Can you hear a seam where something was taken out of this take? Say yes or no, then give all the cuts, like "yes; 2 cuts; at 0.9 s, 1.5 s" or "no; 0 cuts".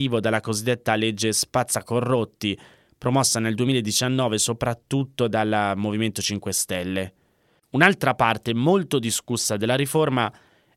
yes; 1 cut; at 7.6 s